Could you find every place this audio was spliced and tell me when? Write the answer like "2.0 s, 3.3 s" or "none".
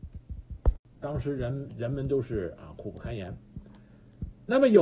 0.9 s